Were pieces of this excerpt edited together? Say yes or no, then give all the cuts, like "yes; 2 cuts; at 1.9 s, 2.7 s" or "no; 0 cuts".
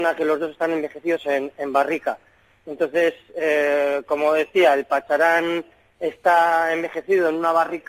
no; 0 cuts